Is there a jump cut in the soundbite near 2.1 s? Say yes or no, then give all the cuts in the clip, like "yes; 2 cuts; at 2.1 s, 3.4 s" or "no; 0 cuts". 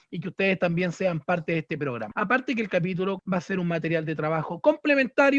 yes; 2 cuts; at 2.1 s, 3.2 s